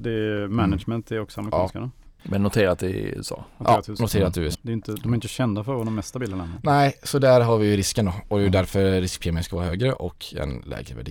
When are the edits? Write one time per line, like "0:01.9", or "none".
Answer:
0:04.5